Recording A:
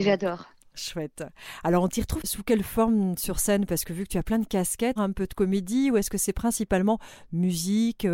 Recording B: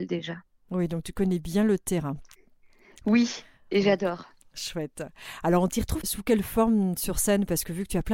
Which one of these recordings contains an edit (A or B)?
A